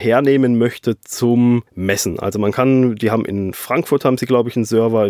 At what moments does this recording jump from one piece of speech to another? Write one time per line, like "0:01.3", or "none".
0:01.7

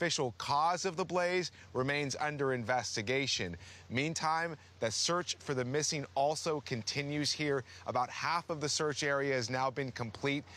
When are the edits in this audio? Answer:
none

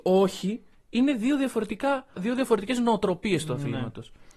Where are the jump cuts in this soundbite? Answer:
0:02.2

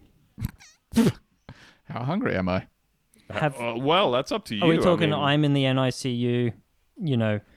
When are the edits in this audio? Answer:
none

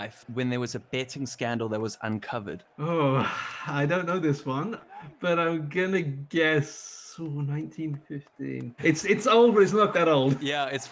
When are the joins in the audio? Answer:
0:04.8
0:08.8
0:09.9

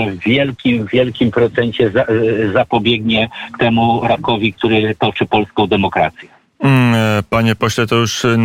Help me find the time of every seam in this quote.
none

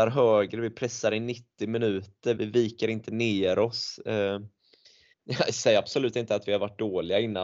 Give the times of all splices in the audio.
0:02.4
0:05.1

